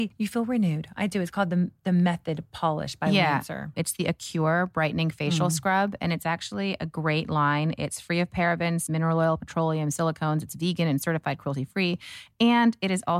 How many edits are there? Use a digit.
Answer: 2